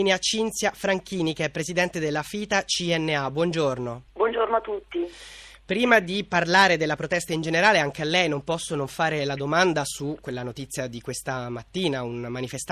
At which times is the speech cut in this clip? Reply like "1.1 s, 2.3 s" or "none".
4.1 s